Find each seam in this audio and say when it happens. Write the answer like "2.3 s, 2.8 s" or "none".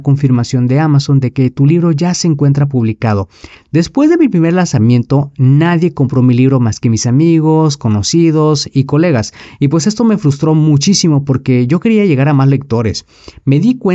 3.5 s

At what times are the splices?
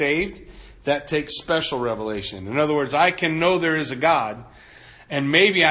none

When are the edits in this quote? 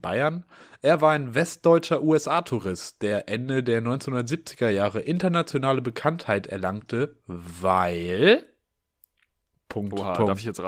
none

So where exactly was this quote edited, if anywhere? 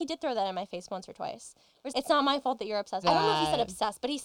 1.9 s, 3.0 s

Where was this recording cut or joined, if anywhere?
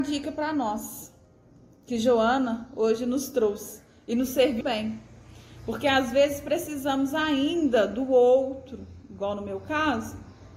4.6 s

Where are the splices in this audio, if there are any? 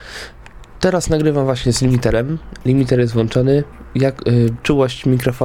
none

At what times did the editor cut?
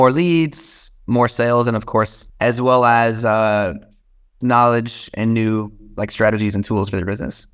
2.3 s, 4.4 s

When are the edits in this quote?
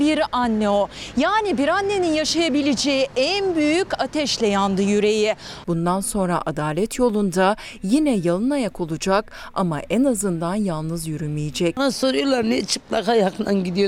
5.6 s

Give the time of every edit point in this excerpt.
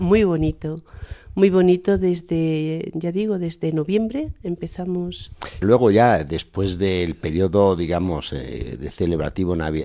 5.6 s

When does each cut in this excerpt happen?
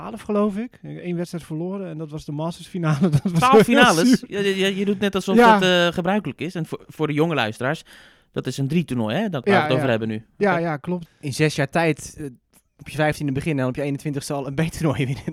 11.0 s

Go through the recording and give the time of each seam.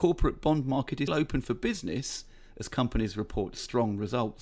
1.1 s

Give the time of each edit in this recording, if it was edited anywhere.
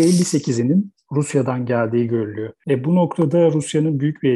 none

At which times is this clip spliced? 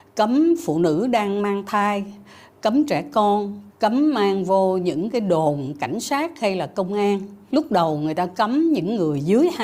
3.7 s, 7.5 s

